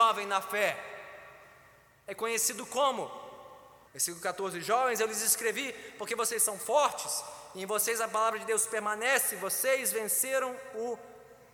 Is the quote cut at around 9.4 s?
no; 1 cut; at 3.9 s

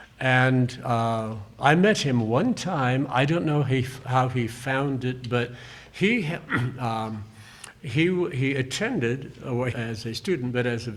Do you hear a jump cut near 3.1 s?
no; 1 cut; at 9.7 s

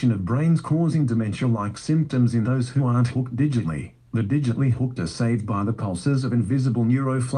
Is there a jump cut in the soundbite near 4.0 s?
no; 0 cuts

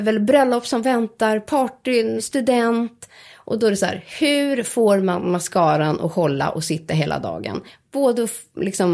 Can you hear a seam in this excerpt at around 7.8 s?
no; 1 cut; at 2.2 s

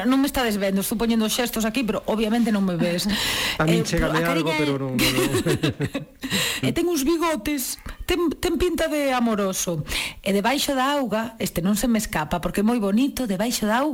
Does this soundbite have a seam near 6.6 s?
yes; 1 cut; at 6.6 s

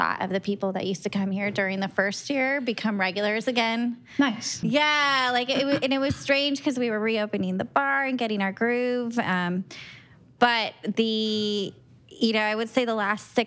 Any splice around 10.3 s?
no; 1 cut; at 4.6 s

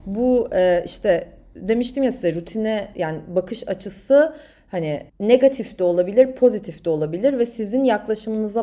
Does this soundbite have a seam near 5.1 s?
yes; 1 cut; at 5.1 s

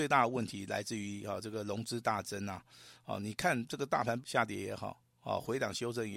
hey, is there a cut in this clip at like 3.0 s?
no; 1 cut; at 4.2 s

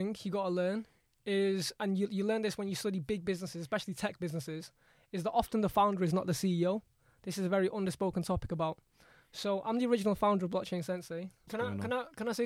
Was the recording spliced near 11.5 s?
yes; 1 cut; at 11.5 s

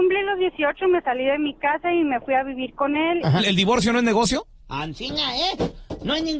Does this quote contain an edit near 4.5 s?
yes; 2 cuts; at 3.4 s, 4.5 s

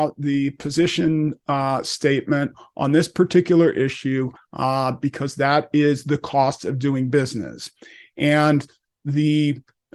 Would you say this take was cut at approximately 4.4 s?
yes; 1 cut; at 4.4 s

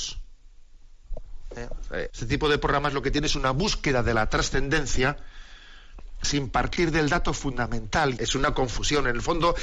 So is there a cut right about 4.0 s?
no; 3 cuts; at 2.1 s, 6.2 s, 8.2 s

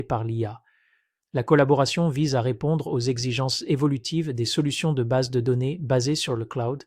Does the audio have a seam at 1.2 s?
yes; 1 cut; at 1.2 s

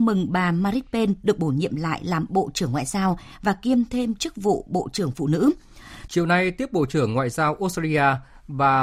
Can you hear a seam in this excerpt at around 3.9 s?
no; 1 cut; at 6.1 s

